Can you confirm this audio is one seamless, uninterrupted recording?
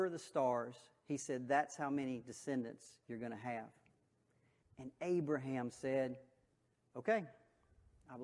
no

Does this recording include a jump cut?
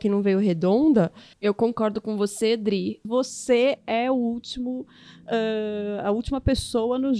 yes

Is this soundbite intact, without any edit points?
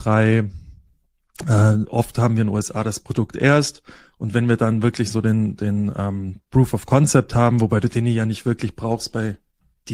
yes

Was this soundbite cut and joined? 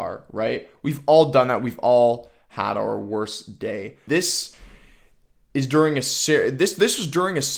yes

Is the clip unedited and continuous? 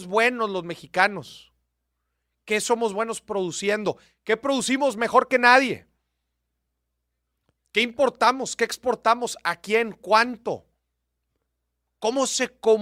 yes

